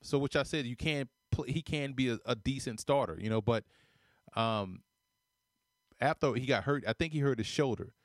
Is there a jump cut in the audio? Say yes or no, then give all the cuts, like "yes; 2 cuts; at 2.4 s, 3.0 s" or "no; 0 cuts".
no; 0 cuts